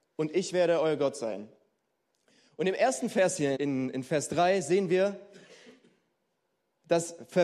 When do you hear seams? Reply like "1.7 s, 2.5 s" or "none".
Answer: 3.6 s